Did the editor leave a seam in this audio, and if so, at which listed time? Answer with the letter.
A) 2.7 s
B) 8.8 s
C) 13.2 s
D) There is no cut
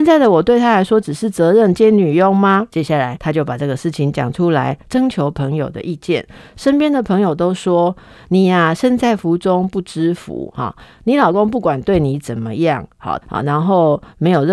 C